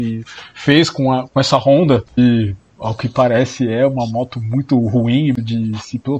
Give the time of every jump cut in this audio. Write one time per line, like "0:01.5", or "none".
none